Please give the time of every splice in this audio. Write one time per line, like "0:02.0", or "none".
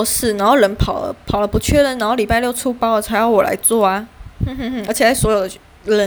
none